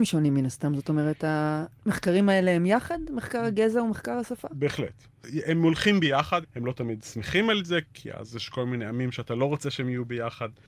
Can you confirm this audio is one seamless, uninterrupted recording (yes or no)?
no